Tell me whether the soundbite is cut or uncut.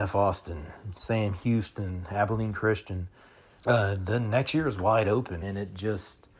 cut